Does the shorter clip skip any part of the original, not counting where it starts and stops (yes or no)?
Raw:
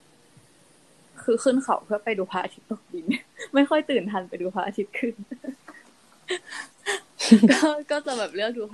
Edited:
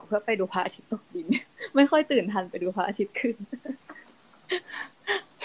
no